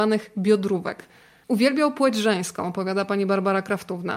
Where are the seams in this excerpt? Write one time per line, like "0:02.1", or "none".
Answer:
0:01.4